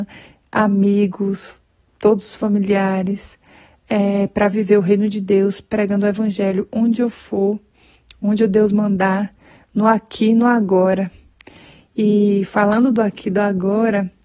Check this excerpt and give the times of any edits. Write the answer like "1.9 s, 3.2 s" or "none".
none